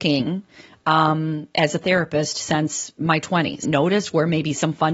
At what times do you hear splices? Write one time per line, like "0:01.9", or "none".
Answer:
0:03.6